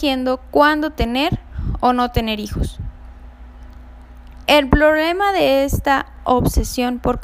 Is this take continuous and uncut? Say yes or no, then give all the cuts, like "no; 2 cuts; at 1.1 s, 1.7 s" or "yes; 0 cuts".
yes; 0 cuts